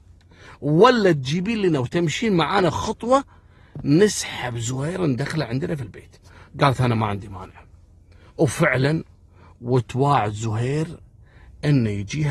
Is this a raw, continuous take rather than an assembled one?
no; 1 cut; at 2.7 s

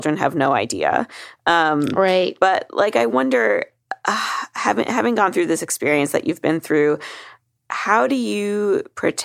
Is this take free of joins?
yes; 0 cuts

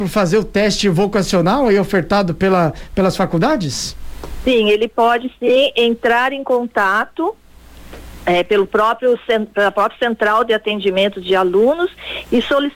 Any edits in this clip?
no; 0 cuts

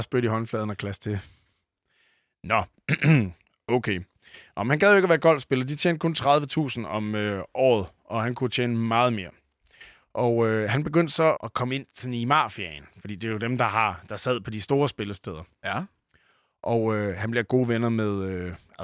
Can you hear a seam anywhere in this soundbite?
yes; 1 cut; at 11.4 s

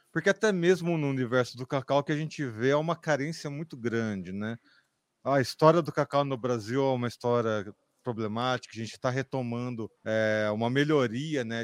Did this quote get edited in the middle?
yes; 2 cuts; at 8.7 s, 10.0 s

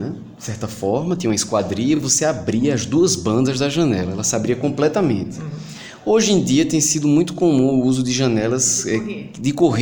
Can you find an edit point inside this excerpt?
no; 0 cuts

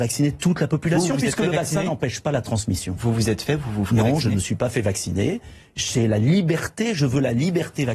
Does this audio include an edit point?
no; 0 cuts

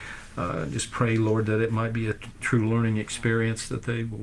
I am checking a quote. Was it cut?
no; 0 cuts

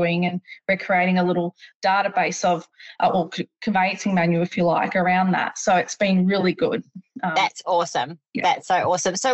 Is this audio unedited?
yes; 0 cuts

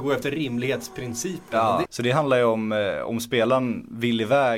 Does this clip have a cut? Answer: yes; 1 cut; at 1.8 s

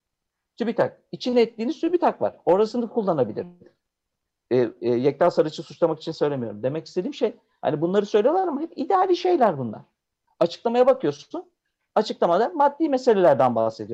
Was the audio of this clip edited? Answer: yes; 2 cuts; at 4.8 s, 10.3 s

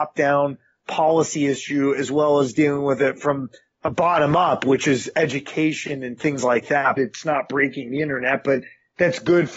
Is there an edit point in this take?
yes; 1 cut; at 7.0 s

